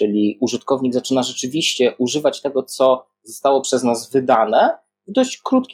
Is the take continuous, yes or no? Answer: yes